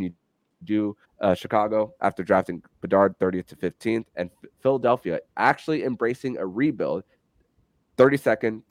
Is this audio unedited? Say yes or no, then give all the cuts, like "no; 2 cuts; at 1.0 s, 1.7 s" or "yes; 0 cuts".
no; 1 cut; at 1.0 s